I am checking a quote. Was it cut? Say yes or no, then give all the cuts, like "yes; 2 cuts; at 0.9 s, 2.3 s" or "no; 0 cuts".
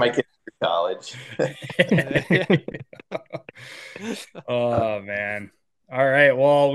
no; 0 cuts